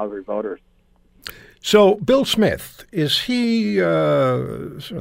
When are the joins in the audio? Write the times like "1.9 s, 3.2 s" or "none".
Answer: none